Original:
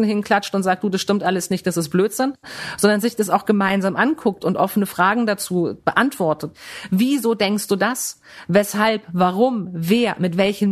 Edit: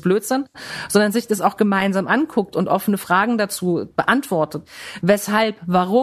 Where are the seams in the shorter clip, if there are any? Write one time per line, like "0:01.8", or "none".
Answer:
0:05.0